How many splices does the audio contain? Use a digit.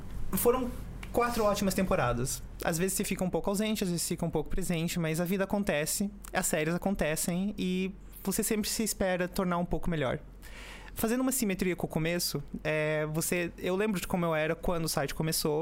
0